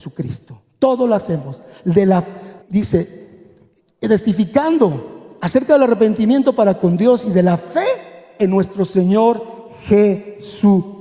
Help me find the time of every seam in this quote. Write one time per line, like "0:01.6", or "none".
0:02.6